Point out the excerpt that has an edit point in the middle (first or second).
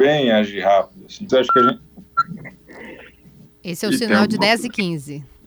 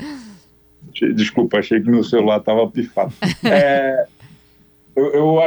first